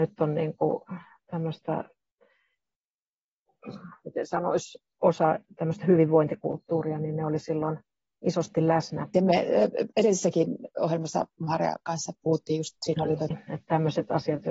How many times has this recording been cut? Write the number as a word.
two